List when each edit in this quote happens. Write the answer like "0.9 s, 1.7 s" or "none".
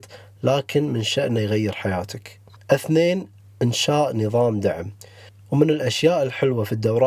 none